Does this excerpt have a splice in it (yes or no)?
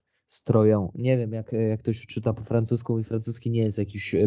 no